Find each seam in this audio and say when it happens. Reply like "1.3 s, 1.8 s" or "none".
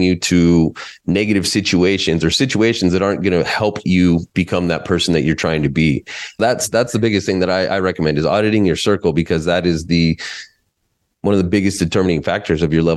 6.4 s